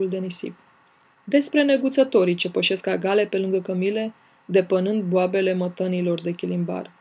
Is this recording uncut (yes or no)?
yes